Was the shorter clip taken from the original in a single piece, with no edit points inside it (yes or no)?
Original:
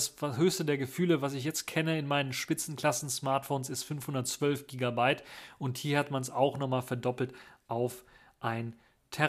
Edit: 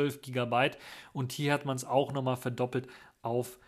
yes